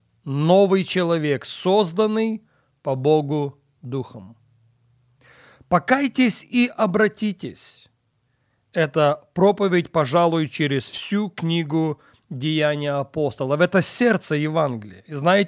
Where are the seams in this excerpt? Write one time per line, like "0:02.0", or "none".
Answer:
none